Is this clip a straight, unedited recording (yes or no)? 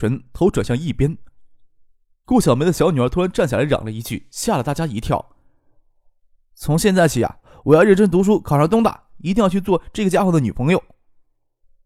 no